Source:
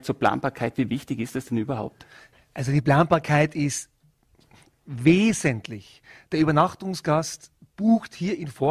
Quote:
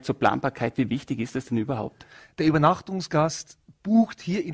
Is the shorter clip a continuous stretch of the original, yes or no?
no